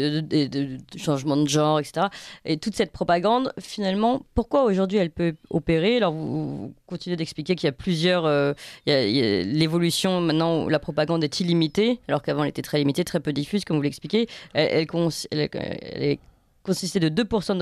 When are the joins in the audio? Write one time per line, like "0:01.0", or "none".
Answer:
none